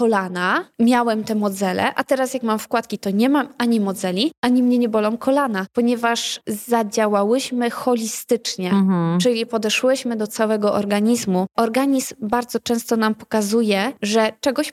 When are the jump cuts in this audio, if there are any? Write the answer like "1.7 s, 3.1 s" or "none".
none